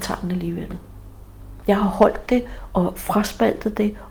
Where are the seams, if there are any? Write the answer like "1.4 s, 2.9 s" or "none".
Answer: 1.6 s